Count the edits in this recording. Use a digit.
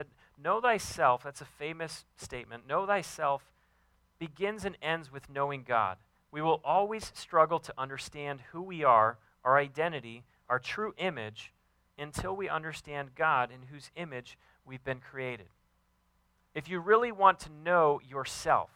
0